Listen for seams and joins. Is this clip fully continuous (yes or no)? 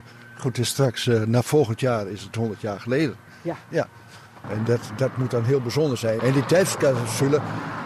no